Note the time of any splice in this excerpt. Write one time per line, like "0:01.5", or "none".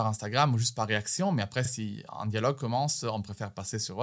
none